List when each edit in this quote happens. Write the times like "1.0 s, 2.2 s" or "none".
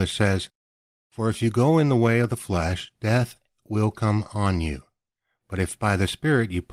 none